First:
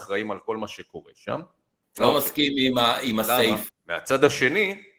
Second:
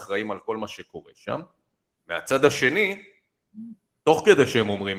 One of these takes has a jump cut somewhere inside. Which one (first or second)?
first